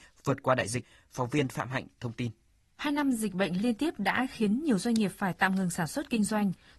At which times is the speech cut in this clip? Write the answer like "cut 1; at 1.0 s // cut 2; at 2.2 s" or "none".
none